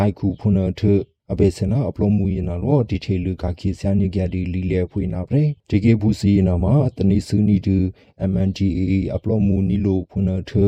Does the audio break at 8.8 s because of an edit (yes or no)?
no